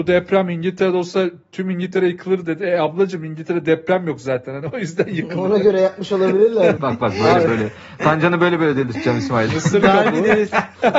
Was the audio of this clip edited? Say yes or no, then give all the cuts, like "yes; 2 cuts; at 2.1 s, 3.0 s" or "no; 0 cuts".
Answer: yes; 1 cut; at 6.8 s